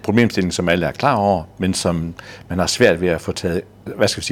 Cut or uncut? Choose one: uncut